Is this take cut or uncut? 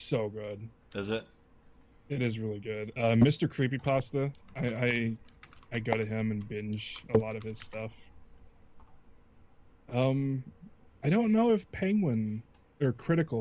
uncut